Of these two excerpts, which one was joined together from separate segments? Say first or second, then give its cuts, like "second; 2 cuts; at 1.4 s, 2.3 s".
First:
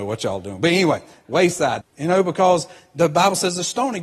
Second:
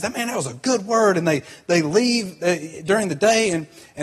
first; 1 cut; at 1.8 s